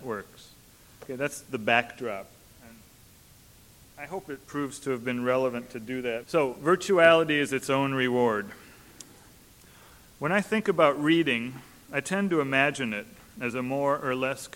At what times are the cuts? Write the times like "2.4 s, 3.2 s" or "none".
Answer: 0.9 s, 4.4 s, 6.2 s